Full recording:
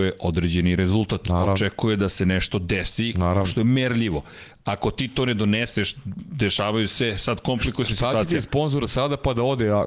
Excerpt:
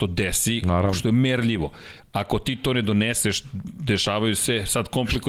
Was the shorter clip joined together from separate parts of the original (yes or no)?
no